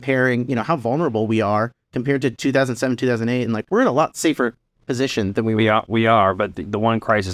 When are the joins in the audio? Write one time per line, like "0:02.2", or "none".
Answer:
none